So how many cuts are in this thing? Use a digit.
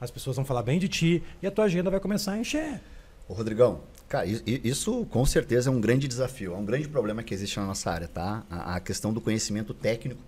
0